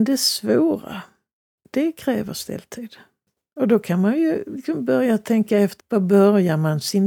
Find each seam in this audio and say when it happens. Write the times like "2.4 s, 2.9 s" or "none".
5.8 s